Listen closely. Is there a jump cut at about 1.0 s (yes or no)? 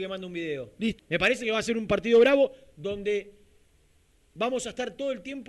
yes